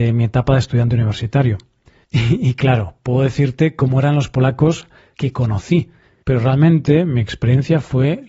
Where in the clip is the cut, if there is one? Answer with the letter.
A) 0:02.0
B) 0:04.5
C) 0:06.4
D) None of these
A